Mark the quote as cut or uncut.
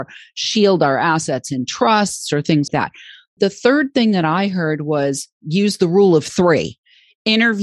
cut